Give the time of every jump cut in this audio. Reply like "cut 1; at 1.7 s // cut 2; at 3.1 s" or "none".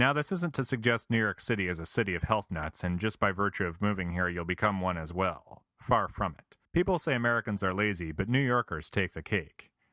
cut 1; at 6.7 s